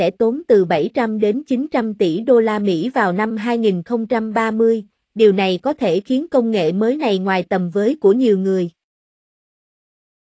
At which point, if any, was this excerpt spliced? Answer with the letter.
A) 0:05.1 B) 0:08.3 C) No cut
C